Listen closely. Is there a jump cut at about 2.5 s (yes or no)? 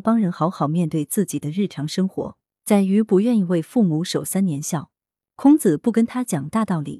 yes